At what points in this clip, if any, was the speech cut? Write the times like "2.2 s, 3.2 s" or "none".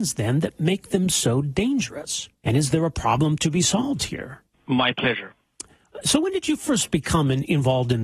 2.4 s, 4.5 s